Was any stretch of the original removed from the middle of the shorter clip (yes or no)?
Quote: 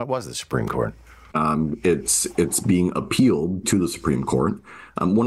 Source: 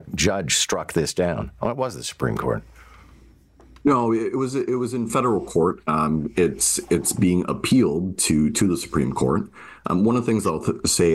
yes